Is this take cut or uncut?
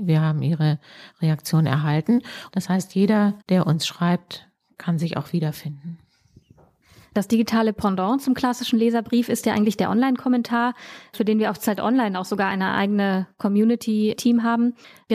cut